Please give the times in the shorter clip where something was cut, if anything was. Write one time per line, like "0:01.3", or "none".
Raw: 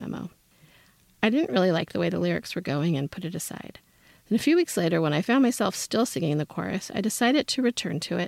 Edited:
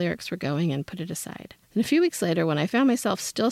0:01.6